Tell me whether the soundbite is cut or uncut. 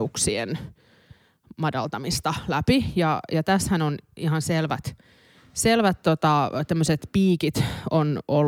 uncut